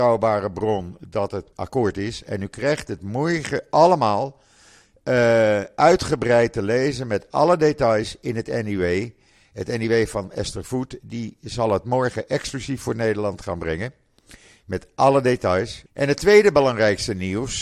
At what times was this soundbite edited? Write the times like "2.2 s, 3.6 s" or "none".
1.5 s, 15.9 s